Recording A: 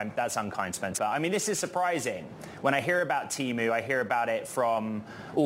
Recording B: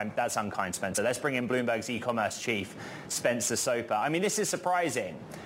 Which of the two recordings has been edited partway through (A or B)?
A